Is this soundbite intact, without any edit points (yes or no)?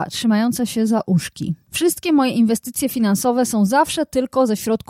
no